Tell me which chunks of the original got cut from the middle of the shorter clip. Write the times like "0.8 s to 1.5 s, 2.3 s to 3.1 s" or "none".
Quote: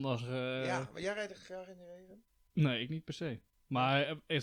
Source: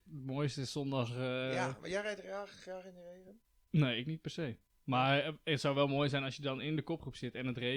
2.2 s to 2.5 s

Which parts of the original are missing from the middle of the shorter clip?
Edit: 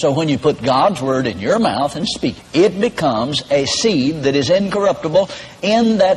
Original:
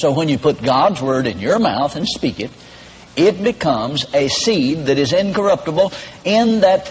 2.4 s to 3.0 s

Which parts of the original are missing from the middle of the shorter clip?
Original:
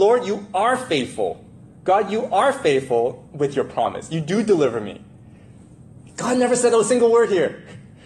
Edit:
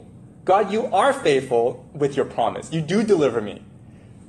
none

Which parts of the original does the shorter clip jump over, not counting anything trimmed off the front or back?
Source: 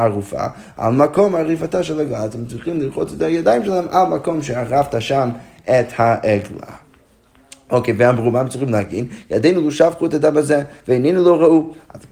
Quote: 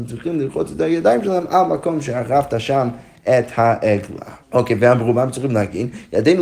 6.8 s to 7.6 s

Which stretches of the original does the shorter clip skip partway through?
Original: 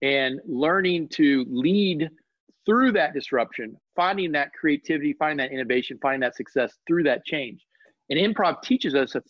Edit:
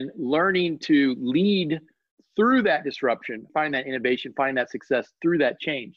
3.8 s to 5.1 s

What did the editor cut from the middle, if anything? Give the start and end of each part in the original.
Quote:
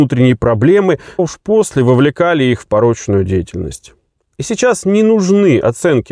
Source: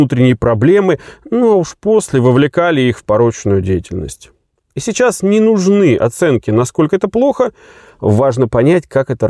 1.2 s to 1.6 s

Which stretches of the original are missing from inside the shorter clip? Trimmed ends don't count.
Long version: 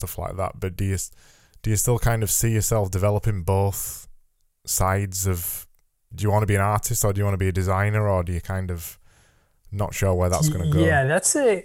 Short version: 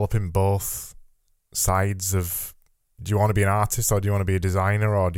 none

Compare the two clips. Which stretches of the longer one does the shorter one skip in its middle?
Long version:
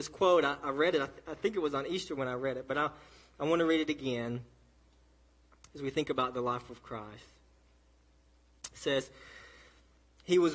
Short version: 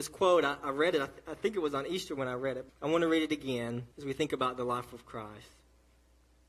2.7 s to 3.3 s, 4.5 s to 5.7 s

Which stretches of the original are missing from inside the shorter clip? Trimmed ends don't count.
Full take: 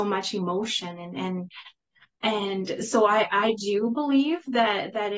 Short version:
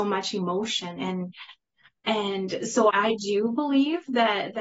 1.0 s to 1.1 s, 3.1 s to 3.3 s

